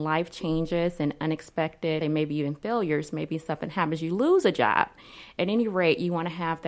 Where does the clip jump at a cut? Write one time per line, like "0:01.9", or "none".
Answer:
0:02.0